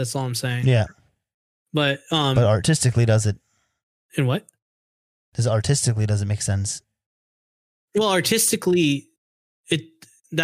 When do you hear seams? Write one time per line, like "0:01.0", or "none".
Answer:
none